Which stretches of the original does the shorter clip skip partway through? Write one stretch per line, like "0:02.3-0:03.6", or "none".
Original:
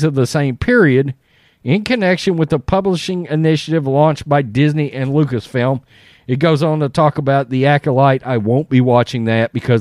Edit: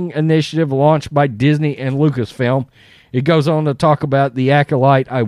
none